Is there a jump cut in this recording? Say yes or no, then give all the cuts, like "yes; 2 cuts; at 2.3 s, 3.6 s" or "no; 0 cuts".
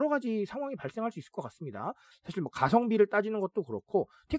yes; 1 cut; at 2.1 s